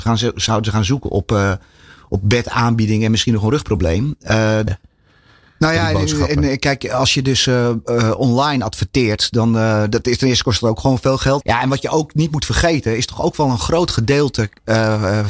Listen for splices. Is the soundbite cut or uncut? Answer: cut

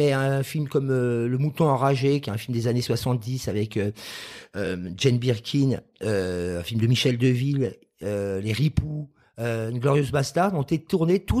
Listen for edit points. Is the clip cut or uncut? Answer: uncut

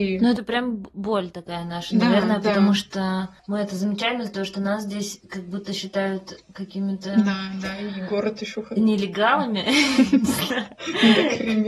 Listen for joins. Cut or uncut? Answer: cut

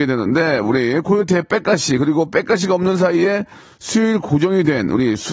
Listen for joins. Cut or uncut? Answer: uncut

